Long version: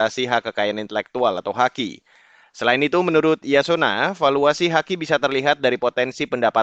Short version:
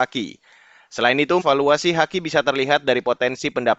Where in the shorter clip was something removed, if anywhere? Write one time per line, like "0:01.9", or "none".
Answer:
0:01.4